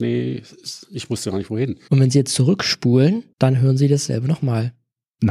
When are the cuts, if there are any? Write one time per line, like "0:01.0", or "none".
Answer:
0:01.9
0:03.3